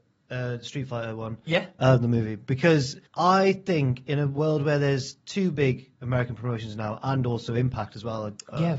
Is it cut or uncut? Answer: cut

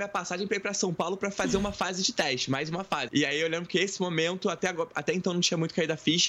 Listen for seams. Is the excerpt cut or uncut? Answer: cut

